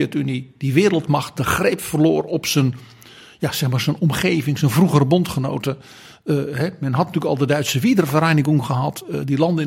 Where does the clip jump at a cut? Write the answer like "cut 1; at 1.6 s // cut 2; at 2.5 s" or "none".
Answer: none